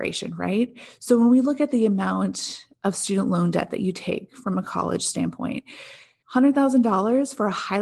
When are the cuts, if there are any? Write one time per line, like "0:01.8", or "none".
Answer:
0:06.2